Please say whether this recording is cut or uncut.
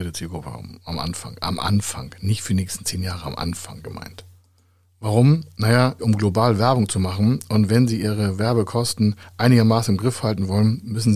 cut